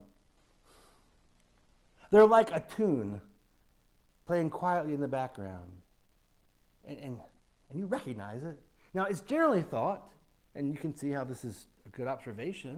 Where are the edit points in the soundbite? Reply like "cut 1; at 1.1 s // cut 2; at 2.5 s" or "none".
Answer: cut 1; at 8.8 s